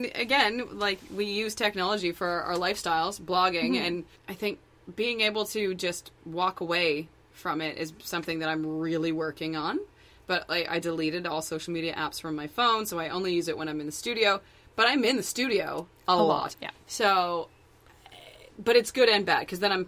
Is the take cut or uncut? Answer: cut